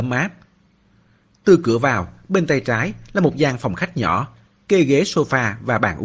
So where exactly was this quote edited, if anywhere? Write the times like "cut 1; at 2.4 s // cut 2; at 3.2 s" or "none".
none

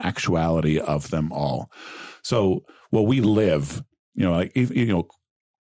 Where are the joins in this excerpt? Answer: none

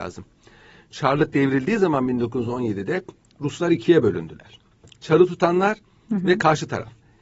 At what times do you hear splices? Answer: none

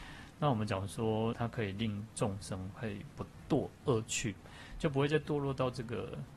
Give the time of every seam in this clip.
cut 1; at 1.3 s

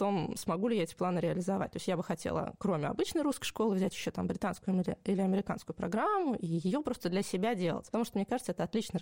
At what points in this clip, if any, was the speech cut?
none

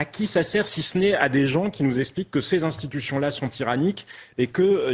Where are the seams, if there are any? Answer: none

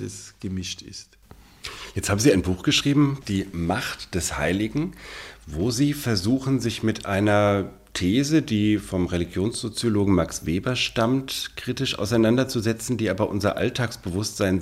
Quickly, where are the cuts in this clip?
cut 1; at 3.2 s

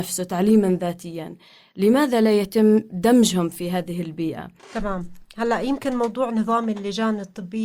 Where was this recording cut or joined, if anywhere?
cut 1; at 4.6 s

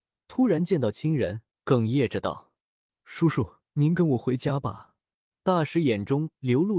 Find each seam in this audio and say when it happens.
cut 1; at 1.5 s // cut 2; at 3.6 s // cut 3; at 5.3 s

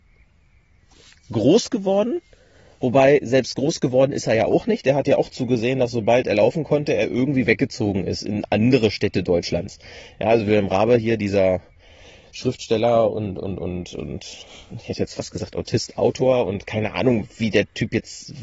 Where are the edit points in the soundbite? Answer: none

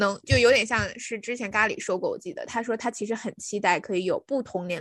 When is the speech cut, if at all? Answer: none

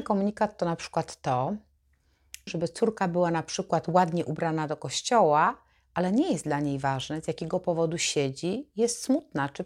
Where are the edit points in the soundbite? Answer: cut 1; at 2.5 s

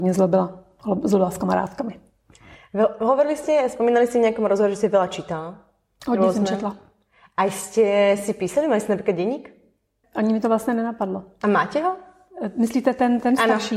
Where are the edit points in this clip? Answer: cut 1; at 10.0 s

